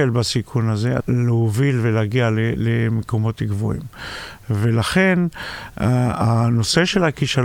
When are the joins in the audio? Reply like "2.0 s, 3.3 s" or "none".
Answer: 1.0 s